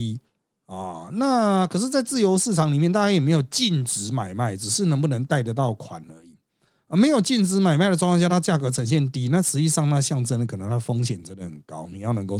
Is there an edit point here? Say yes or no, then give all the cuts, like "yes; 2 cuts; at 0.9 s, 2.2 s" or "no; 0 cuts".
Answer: no; 0 cuts